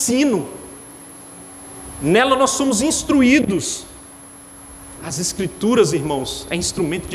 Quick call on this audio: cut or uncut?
cut